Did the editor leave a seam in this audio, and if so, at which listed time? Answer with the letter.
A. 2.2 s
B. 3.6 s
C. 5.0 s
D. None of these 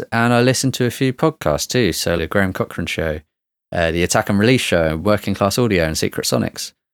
A